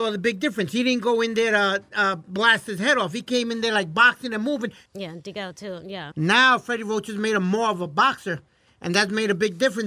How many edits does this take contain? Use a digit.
2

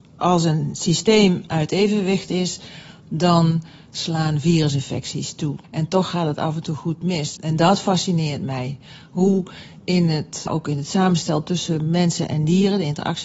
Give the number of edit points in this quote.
3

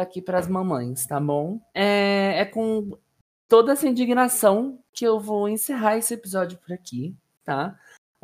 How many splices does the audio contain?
1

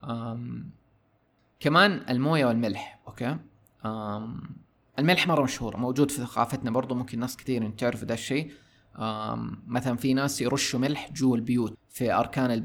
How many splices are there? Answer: 1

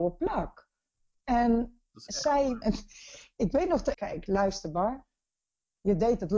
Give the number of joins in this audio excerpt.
2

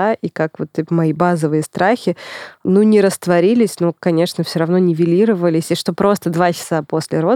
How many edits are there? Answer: 0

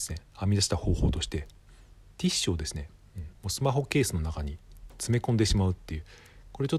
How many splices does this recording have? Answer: 1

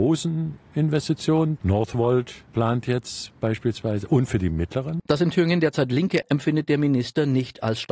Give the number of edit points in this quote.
3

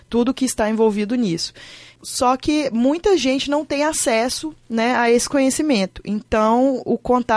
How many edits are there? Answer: 0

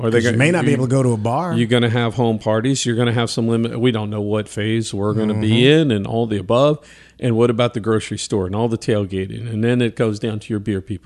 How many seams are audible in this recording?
0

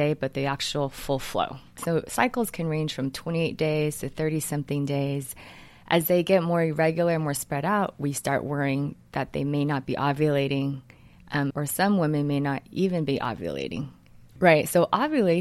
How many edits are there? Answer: 3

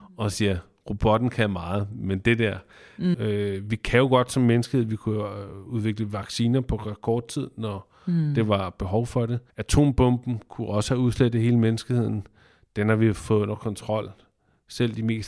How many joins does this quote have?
2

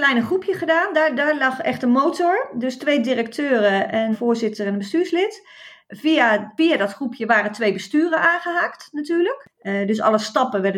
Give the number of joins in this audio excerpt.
1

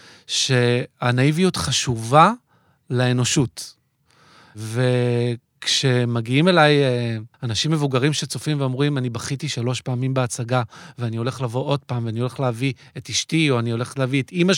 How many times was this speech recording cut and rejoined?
1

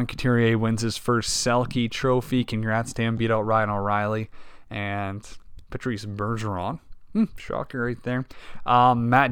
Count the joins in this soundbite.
0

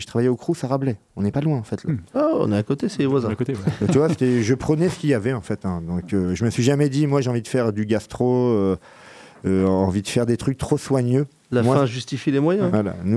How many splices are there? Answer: 0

